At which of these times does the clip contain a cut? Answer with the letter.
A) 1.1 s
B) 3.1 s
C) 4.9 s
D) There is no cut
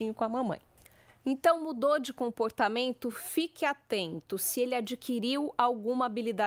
D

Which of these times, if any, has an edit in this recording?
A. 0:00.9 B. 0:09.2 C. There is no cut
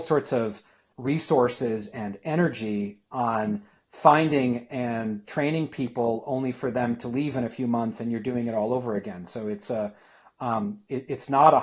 A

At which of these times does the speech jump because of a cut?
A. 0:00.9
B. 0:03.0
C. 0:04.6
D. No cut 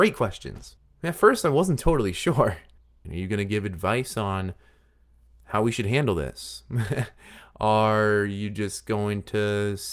B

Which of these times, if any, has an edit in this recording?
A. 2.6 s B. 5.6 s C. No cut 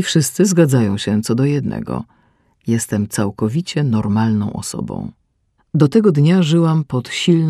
B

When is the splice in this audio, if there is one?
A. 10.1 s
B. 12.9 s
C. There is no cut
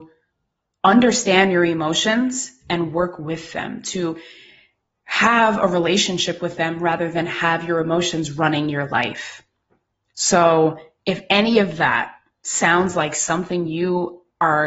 C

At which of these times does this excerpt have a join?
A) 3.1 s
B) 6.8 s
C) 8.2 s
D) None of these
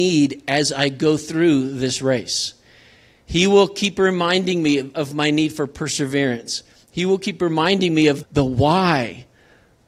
C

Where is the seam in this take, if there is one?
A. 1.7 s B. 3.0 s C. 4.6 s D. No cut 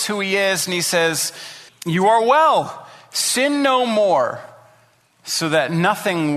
A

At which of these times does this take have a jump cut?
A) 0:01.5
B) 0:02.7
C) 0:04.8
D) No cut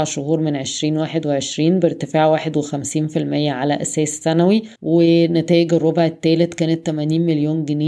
C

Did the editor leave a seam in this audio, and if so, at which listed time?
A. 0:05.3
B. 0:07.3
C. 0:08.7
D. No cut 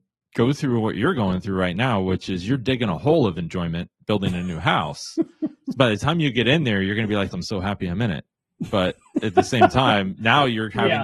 B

